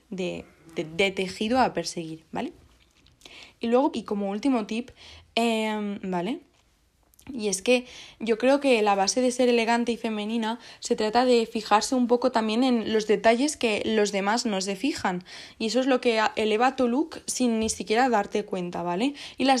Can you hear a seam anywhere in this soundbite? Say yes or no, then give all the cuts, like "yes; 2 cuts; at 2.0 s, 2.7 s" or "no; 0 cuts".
yes; 2 cuts; at 3.9 s, 6.0 s